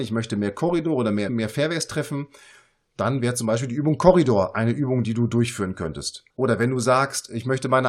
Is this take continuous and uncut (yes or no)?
no